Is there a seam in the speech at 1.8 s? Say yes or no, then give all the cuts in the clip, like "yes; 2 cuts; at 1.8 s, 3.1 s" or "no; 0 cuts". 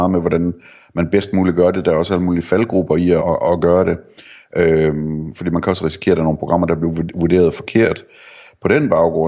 no; 1 cut; at 3.2 s